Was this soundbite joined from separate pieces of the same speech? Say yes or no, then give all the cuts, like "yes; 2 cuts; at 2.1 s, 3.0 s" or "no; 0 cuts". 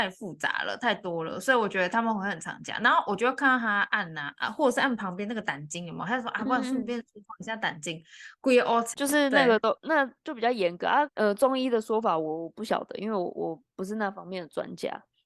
yes; 2 cuts; at 8.9 s, 11.1 s